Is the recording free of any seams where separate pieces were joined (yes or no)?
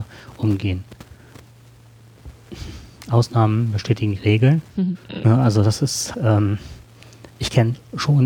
no